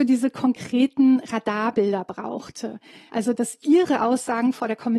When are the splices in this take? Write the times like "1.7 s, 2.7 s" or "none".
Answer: none